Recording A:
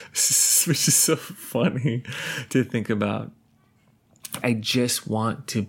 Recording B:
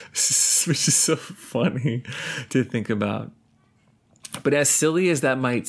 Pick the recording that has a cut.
A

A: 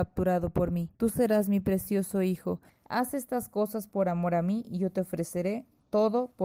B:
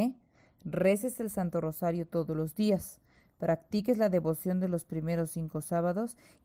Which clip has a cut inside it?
A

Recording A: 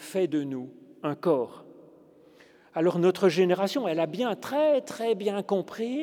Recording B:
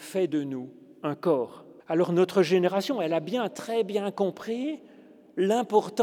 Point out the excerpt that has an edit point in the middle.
B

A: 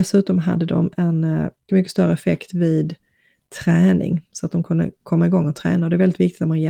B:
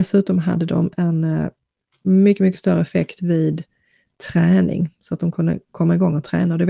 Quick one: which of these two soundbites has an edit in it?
A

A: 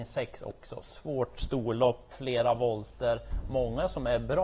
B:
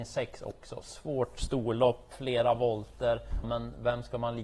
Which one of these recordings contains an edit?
B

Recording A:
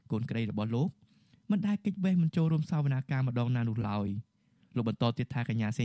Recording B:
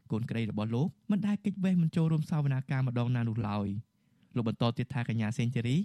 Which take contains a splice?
B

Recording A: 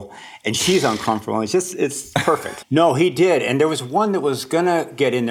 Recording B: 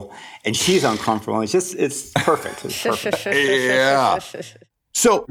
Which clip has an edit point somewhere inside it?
A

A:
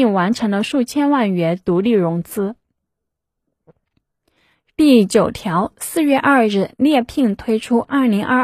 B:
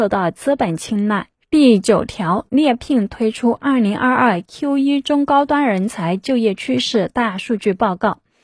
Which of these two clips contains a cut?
B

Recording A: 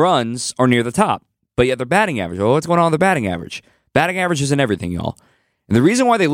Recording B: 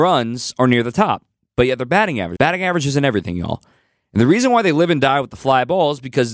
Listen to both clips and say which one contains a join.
B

